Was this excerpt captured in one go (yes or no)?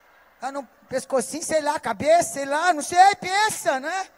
yes